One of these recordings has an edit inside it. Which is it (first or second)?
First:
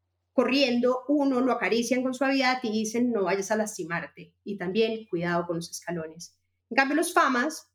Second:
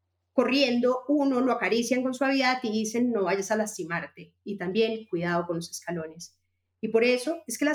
first